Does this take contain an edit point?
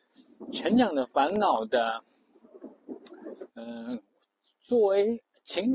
yes; 1 cut; at 3.5 s

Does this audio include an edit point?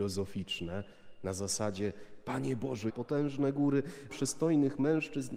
yes; 2 cuts; at 2.9 s, 4.1 s

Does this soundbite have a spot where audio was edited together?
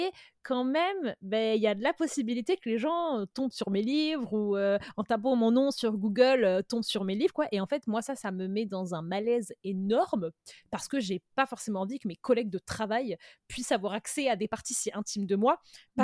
no; 0 cuts

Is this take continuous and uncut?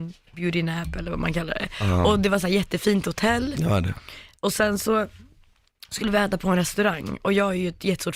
yes; 0 cuts

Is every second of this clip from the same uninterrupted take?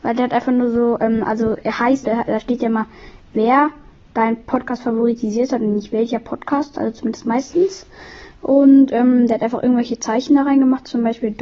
no; 1 cut; at 2.0 s

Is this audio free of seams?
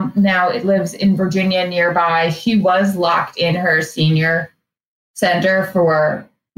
yes; 0 cuts

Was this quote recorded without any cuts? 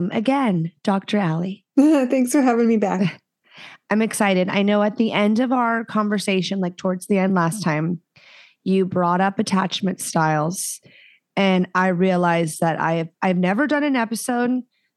yes; 0 cuts

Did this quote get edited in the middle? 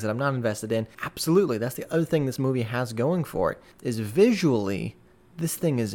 yes; 2 cuts; at 0.9 s, 3.7 s

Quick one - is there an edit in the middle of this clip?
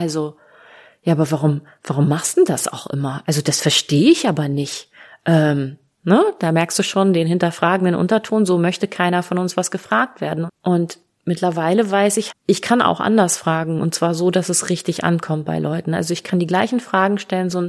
yes; 3 cuts; at 3.2 s, 10.5 s, 12.3 s

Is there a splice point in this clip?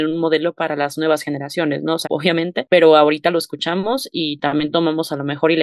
yes; 1 cut; at 2.0 s

